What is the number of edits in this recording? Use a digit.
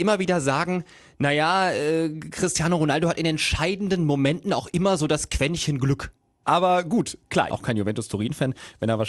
2